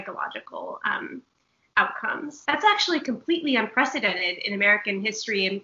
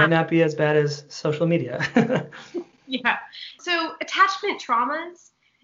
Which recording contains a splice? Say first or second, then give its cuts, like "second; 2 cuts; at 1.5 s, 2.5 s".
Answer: first; 1 cut; at 2.4 s